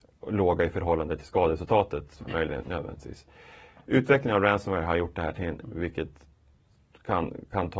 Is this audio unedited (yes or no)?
no